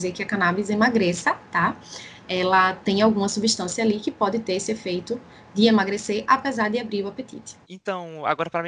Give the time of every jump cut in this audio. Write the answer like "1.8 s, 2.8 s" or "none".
7.6 s

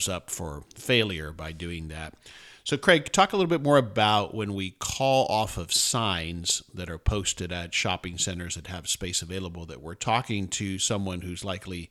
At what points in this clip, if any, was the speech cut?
none

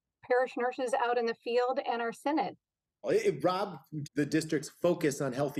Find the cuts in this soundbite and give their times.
3.0 s, 4.0 s

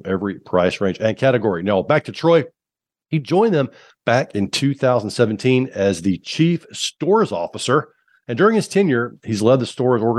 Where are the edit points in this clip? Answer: none

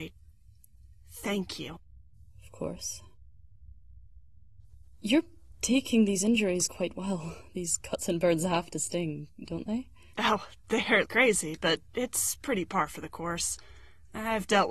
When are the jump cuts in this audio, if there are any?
11.1 s

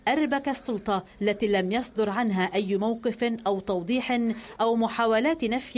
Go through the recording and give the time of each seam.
none

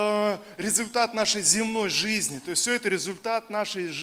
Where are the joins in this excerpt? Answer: none

